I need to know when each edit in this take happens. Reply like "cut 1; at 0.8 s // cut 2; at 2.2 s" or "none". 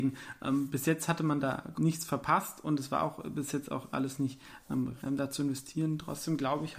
cut 1; at 1.7 s // cut 2; at 5.0 s